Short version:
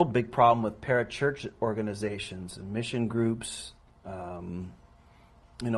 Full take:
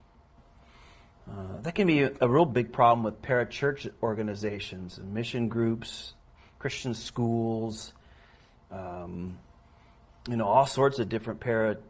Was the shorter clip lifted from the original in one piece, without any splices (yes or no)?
no